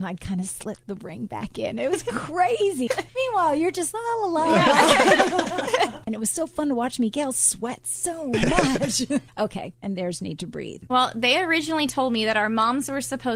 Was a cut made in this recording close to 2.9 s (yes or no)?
yes